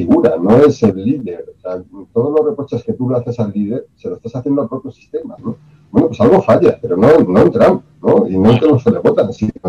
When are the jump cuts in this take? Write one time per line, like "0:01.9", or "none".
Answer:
0:05.4